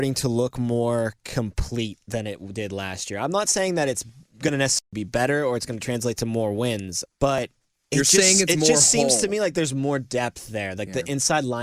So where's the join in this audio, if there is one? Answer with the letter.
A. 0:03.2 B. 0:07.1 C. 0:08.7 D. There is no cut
B